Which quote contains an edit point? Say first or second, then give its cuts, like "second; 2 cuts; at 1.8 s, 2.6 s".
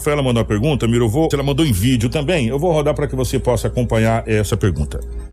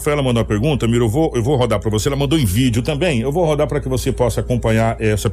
first; 1 cut; at 1.3 s